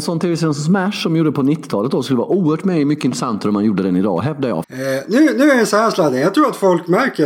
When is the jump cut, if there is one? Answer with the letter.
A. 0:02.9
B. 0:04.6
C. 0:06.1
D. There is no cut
B